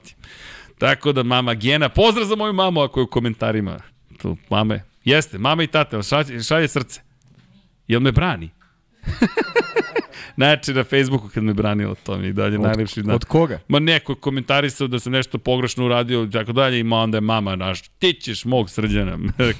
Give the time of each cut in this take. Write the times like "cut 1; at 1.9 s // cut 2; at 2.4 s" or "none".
none